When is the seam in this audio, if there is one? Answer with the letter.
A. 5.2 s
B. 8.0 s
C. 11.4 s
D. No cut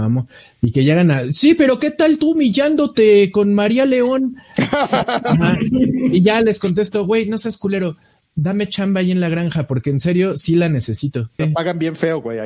C